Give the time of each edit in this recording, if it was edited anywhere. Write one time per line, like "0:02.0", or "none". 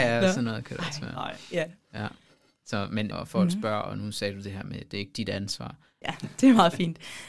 0:03.1
0:06.0